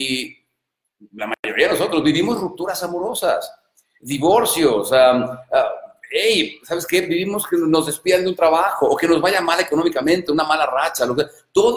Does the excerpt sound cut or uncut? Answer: uncut